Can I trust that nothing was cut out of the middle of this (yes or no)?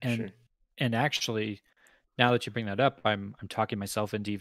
yes